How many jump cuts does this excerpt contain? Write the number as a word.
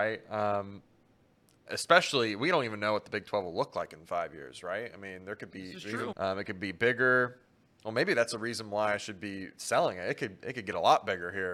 one